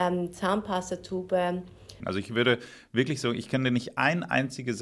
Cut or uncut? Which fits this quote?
cut